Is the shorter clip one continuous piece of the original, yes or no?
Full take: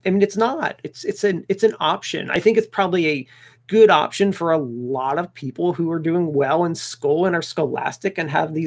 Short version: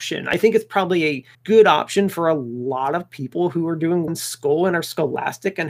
no